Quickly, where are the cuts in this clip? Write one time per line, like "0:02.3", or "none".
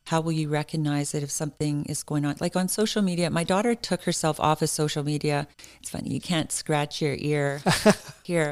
none